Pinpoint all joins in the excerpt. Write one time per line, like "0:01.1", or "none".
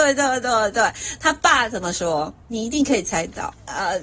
none